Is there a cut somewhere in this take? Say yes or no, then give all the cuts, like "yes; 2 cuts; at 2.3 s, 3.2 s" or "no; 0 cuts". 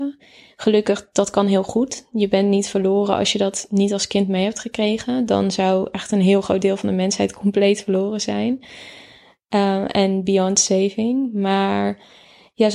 no; 0 cuts